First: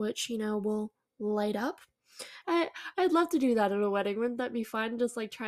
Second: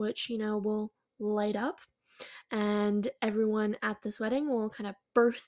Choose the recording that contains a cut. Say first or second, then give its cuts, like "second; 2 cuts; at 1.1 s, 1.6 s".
first; 1 cut; at 2.4 s